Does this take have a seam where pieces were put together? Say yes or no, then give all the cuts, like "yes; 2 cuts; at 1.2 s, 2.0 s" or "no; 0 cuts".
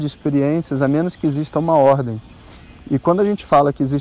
no; 0 cuts